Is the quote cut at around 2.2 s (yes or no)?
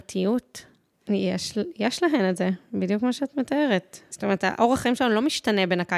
no